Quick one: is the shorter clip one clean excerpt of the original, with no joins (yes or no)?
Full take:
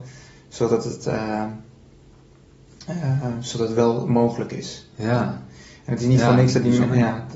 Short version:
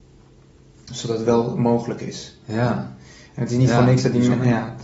no